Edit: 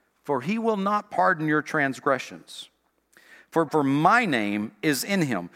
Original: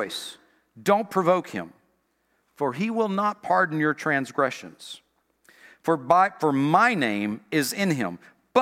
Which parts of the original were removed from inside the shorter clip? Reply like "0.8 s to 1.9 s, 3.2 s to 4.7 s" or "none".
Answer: 6.0 s to 6.4 s